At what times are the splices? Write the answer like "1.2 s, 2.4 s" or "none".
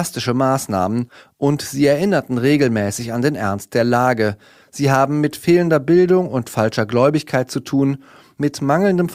4.6 s